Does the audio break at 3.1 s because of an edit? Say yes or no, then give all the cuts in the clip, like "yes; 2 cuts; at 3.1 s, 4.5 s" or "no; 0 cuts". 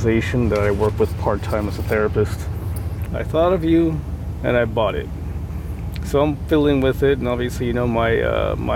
yes; 1 cut; at 3.1 s